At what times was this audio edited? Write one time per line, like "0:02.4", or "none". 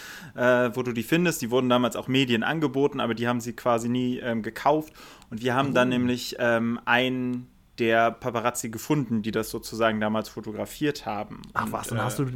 none